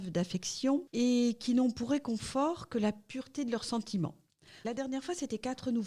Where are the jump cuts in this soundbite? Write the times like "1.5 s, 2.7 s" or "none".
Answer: 4.6 s